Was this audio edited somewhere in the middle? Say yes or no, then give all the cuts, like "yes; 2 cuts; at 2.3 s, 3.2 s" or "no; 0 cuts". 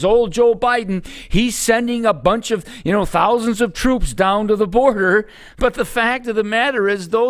no; 0 cuts